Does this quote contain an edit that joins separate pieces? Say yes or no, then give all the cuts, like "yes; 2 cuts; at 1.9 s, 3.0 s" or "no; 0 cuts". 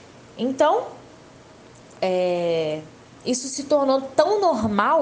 yes; 1 cut; at 3.2 s